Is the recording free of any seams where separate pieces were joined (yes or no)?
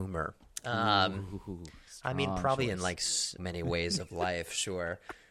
no